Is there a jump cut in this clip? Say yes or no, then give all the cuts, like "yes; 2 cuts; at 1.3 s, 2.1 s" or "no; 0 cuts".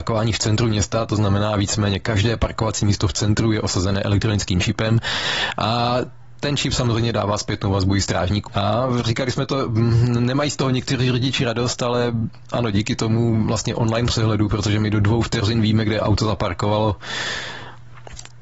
yes; 1 cut; at 8.5 s